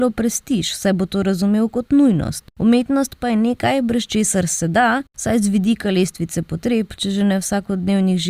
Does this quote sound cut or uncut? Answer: uncut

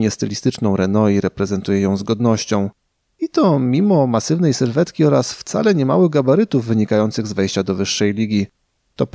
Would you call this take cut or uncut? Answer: uncut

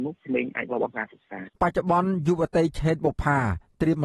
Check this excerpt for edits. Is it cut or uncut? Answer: cut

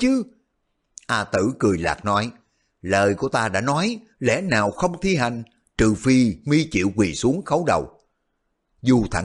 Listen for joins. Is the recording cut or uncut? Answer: uncut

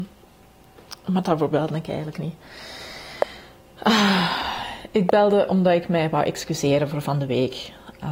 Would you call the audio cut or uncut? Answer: uncut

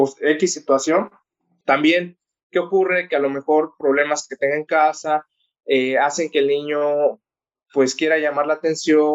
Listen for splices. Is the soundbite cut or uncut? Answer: cut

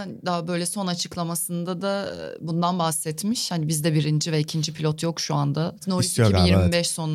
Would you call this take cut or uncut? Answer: cut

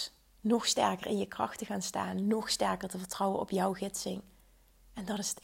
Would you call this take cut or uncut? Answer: uncut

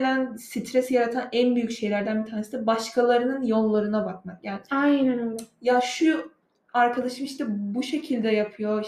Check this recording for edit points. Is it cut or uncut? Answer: uncut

